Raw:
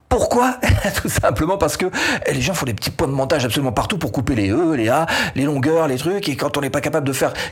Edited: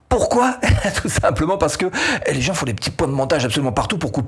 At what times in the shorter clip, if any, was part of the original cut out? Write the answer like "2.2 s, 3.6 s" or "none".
none